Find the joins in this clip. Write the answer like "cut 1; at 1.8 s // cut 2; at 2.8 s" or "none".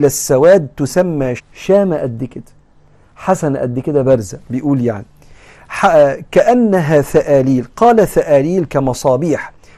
cut 1; at 1.4 s